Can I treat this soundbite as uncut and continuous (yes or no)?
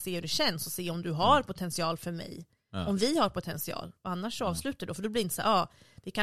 yes